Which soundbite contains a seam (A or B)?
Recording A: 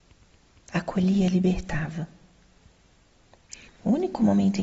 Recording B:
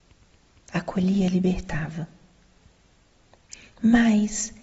A